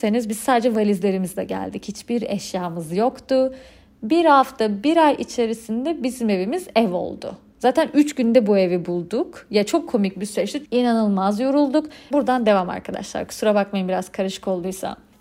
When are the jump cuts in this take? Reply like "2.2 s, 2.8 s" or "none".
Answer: 10.6 s, 12.1 s